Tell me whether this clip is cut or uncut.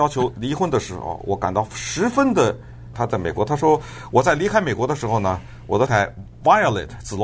cut